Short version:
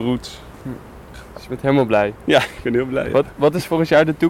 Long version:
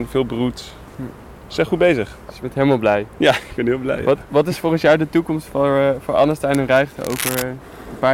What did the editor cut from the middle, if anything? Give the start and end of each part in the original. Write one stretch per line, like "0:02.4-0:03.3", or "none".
0:01.5-0:02.1